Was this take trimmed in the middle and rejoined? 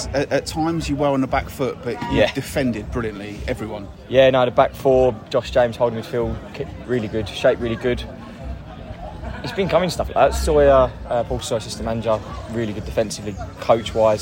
yes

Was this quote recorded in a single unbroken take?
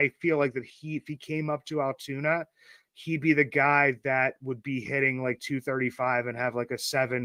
yes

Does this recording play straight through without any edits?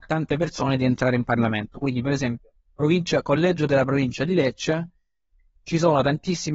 yes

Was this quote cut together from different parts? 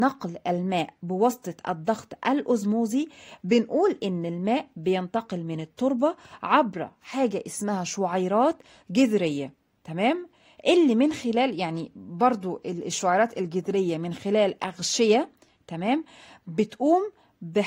no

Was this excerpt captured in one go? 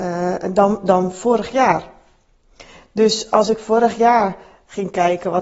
yes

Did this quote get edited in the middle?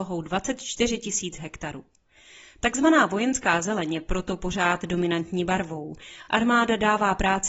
no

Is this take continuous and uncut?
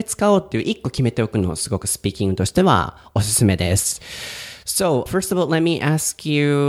no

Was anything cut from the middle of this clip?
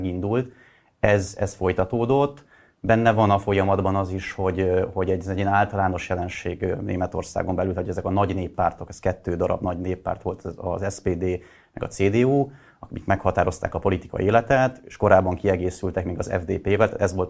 no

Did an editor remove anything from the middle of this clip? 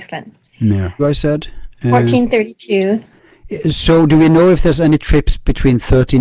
yes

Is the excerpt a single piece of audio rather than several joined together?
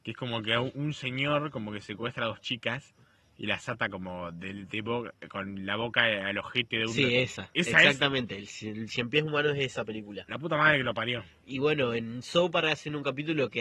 yes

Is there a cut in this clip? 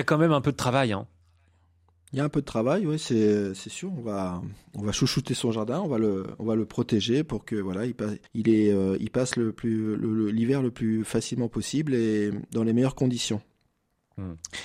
yes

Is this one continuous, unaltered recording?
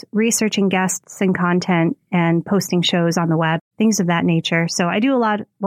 no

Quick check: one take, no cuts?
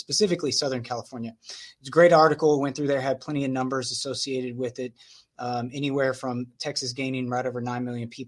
yes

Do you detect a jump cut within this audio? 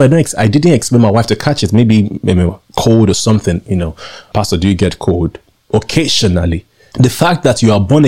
yes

